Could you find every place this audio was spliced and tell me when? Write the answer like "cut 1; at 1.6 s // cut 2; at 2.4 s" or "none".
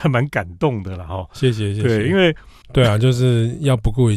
cut 1; at 2.6 s